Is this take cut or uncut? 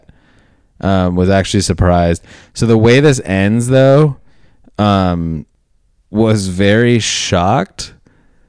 uncut